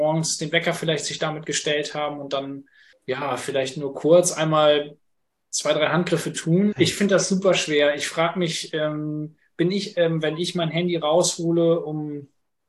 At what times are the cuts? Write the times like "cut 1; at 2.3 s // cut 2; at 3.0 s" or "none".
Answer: cut 1; at 6.7 s